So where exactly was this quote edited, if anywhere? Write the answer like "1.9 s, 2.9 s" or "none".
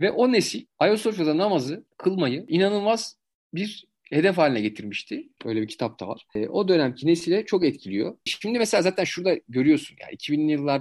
5.4 s, 8.3 s